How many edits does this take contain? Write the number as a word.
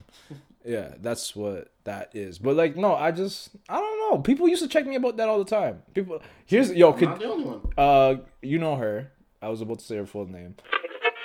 zero